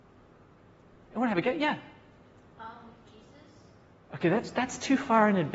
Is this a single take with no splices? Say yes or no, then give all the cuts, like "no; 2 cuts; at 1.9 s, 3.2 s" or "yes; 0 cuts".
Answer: yes; 0 cuts